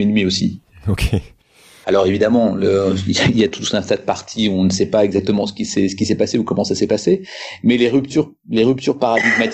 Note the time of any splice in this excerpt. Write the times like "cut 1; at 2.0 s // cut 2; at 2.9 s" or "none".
cut 1; at 1.8 s